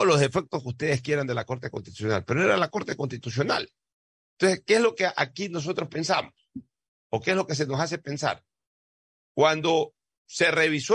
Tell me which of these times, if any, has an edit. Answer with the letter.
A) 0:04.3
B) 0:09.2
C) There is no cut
B